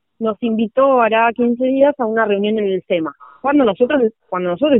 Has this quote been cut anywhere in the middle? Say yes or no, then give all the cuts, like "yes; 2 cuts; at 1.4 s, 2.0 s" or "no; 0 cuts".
no; 0 cuts